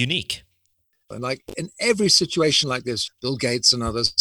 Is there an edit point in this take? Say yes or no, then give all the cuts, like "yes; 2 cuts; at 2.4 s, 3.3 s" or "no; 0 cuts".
yes; 2 cuts; at 1.1 s, 3.1 s